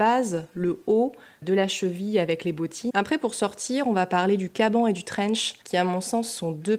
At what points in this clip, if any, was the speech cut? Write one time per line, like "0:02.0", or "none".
0:02.9

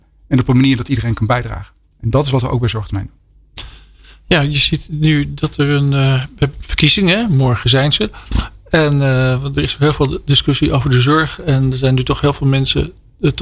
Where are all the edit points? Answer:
none

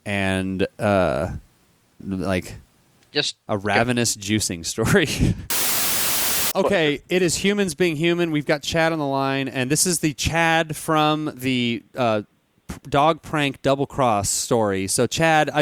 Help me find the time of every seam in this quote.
0:02.0

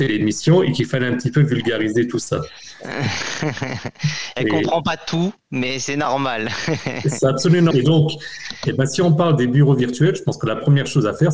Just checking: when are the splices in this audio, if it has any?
0:07.7

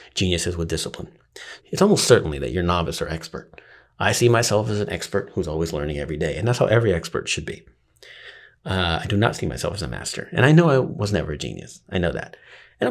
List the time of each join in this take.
0:01.6

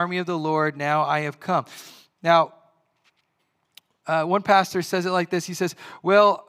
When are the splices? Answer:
none

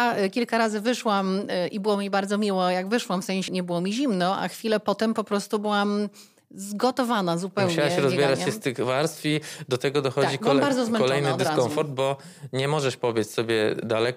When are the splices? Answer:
0:03.5

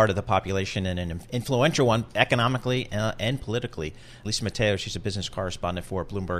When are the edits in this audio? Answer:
0:04.2

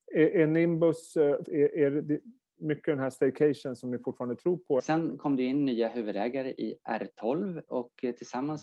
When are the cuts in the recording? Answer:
0:01.5
0:04.8

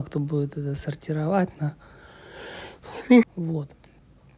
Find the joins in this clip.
0:03.2

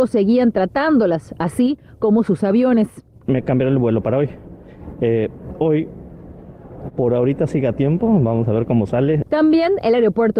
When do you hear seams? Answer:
none

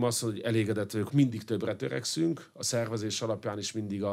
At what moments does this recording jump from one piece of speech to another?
0:01.1

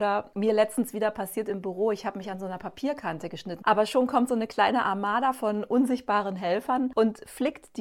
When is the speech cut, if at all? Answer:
0:03.6

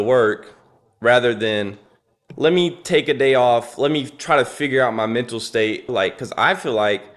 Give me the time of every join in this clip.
0:05.9

